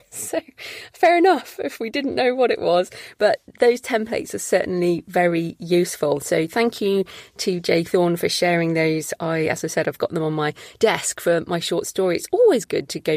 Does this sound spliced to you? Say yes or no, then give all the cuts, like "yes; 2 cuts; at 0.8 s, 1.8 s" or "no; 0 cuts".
no; 0 cuts